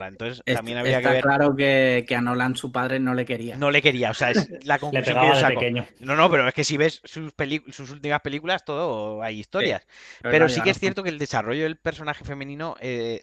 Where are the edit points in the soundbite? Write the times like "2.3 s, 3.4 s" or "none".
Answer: none